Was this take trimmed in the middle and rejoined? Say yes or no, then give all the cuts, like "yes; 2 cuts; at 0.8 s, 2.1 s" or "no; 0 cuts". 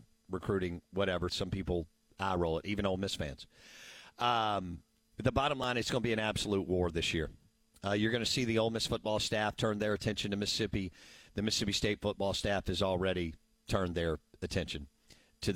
yes; 1 cut; at 1.3 s